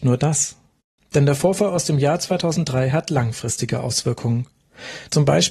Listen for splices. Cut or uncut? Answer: cut